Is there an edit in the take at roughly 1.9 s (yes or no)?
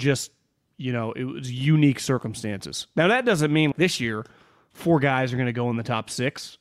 no